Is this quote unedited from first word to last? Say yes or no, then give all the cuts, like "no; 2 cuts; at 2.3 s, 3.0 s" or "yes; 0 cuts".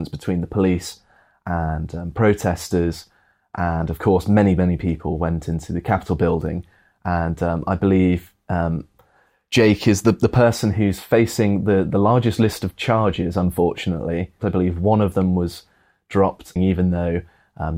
no; 2 cuts; at 14.4 s, 16.6 s